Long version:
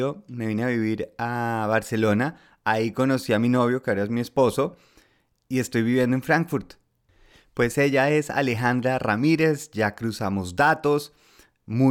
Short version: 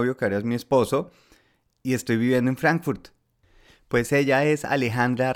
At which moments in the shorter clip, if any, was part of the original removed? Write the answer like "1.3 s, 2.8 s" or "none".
none